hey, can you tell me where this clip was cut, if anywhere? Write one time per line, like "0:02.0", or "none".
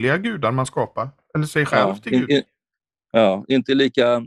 none